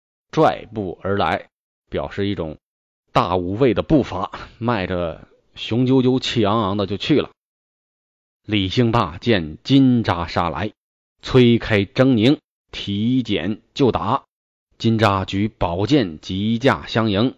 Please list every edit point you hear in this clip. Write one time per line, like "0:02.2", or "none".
0:14.6